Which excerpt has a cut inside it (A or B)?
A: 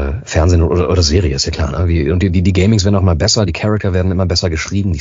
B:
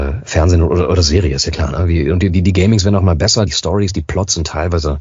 B